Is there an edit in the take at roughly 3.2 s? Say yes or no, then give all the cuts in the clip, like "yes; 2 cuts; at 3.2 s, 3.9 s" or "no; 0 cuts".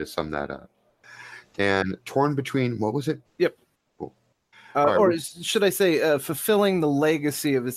yes; 1 cut; at 3.2 s